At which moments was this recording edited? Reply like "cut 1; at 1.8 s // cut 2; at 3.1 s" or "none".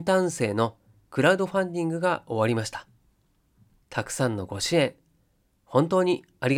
cut 1; at 3.8 s